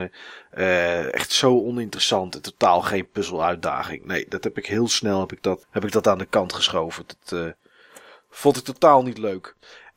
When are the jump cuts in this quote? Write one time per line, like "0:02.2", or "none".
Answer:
0:05.6